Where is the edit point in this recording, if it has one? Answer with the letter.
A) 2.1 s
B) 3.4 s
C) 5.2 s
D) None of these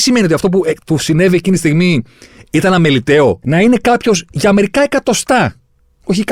B